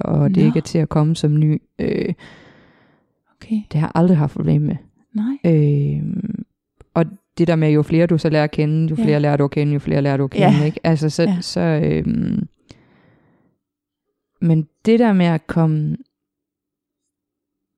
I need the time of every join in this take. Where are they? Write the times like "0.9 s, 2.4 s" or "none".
none